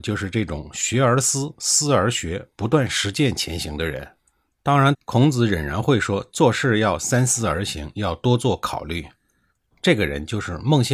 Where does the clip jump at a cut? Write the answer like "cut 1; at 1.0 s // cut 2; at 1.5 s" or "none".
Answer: cut 1; at 4.9 s // cut 2; at 9.7 s